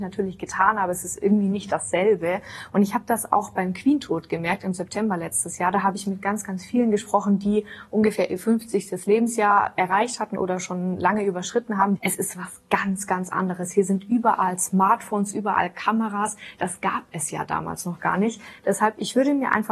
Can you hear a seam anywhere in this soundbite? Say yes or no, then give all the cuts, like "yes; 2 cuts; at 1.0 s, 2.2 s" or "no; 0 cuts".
yes; 1 cut; at 12.0 s